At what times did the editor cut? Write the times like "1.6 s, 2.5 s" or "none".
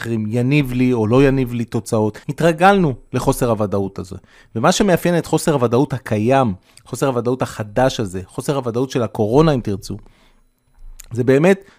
2.2 s